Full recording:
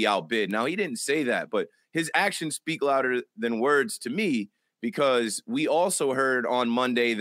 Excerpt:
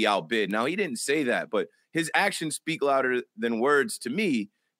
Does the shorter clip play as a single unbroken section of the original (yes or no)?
yes